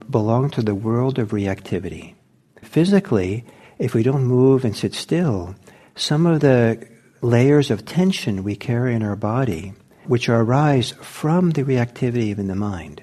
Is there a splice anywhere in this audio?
yes; 2 cuts; at 2.6 s, 10.0 s

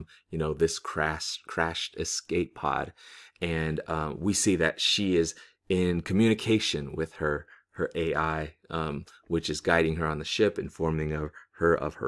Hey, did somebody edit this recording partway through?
no; 0 cuts

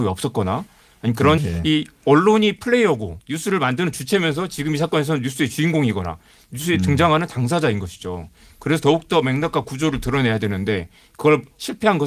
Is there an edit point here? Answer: yes; 1 cut; at 1.4 s

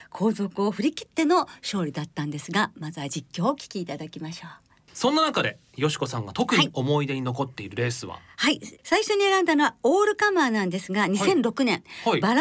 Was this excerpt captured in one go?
no; 1 cut; at 4.9 s

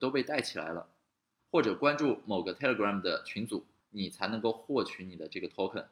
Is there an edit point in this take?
yes; 2 cuts; at 1.4 s, 3.8 s

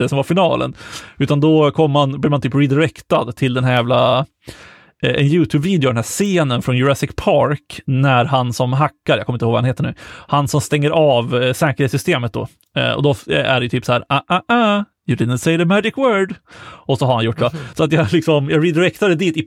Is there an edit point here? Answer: no; 0 cuts

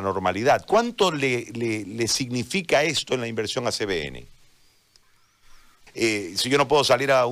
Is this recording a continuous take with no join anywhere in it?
no; 1 cut; at 5.9 s

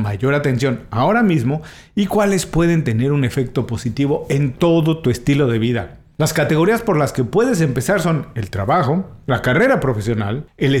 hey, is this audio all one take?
yes; 0 cuts

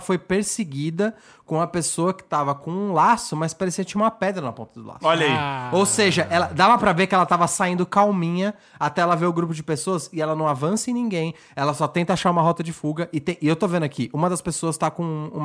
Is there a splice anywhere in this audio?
no; 0 cuts

